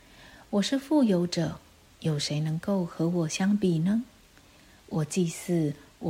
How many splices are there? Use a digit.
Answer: 1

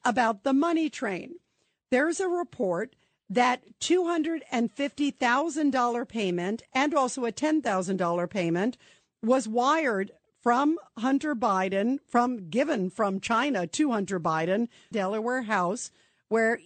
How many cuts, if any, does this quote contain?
1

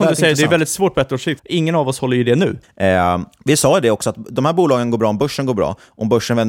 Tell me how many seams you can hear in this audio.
2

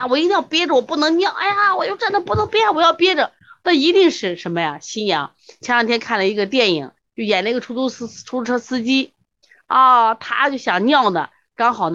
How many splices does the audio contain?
1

